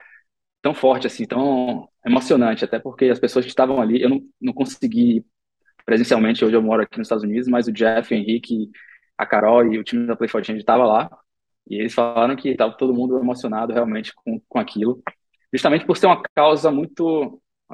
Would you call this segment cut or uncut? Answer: uncut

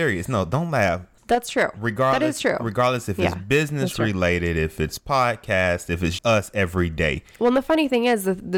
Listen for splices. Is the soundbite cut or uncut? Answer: cut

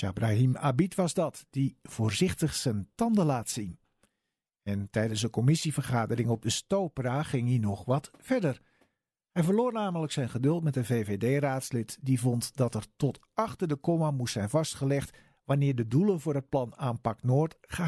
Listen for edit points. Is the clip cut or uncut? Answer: uncut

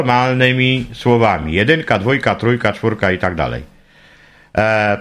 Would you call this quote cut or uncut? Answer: uncut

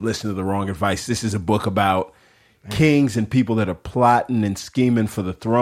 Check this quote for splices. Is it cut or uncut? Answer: uncut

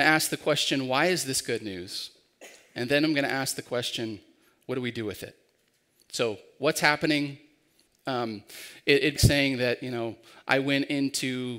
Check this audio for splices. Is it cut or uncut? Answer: cut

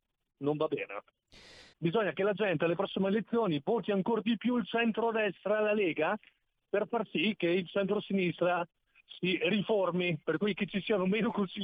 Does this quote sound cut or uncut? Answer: cut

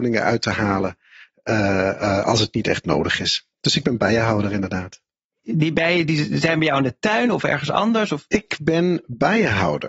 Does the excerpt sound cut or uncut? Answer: cut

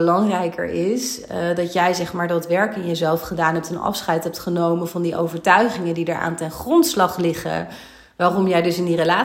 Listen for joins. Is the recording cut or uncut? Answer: uncut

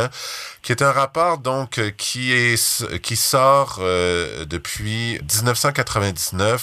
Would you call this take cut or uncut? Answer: cut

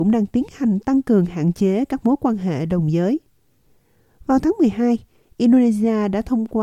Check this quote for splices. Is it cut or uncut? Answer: uncut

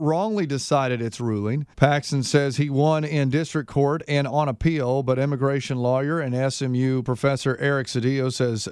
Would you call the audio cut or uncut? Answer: cut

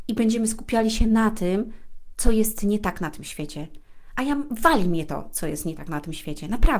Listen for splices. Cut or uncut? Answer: uncut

